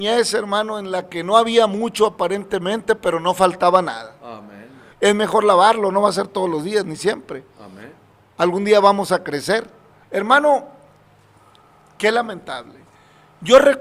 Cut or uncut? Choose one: cut